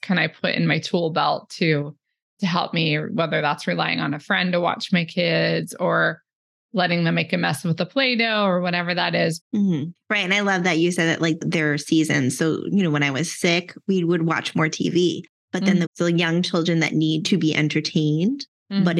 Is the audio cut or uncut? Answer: cut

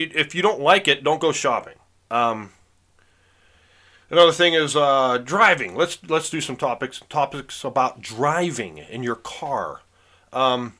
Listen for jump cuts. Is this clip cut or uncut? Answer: cut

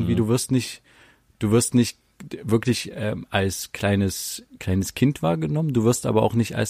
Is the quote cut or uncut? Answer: uncut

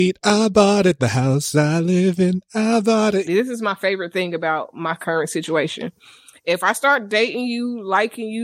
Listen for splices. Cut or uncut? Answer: cut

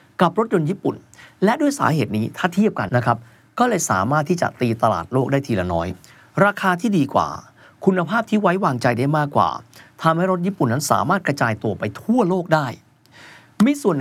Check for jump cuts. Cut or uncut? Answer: cut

